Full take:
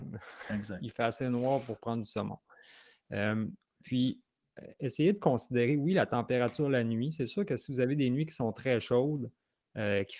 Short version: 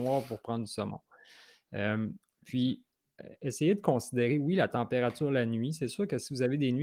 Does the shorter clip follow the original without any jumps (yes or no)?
yes